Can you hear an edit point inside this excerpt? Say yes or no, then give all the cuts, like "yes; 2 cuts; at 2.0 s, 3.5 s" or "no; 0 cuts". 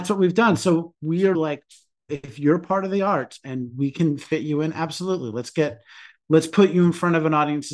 yes; 1 cut; at 1.3 s